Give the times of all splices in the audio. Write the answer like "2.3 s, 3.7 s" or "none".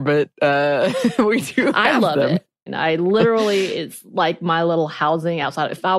2.7 s